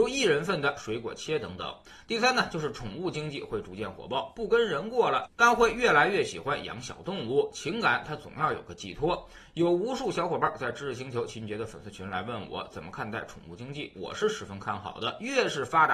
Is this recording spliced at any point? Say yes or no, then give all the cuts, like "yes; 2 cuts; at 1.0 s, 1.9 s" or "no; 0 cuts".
no; 0 cuts